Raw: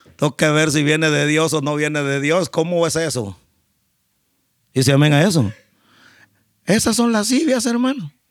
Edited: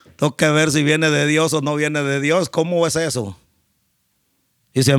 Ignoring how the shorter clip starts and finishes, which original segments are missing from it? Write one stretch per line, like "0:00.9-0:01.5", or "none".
none

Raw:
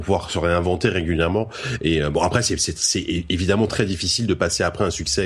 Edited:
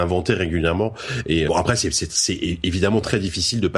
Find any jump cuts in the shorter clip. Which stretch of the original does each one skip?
0:02.0-0:02.1

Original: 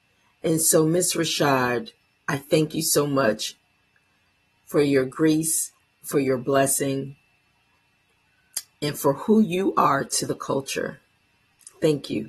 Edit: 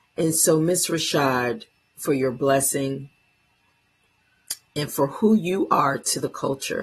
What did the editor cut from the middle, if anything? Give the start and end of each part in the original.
0:02.2-0:06.0

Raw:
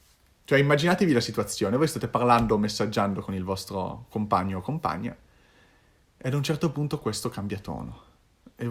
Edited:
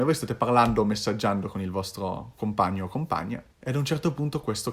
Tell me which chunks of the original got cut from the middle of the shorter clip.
0:05.2-0:06.1

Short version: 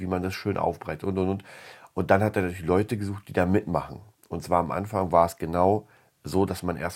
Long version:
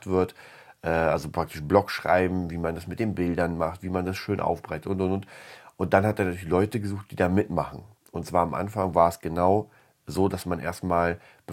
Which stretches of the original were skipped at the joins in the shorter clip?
none

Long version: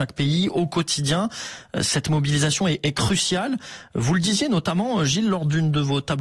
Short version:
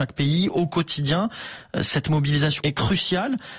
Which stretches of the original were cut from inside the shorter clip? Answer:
0:02.6-0:02.8

